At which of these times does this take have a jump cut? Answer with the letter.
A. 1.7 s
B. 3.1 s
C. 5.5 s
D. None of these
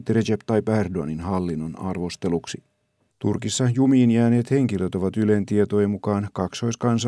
B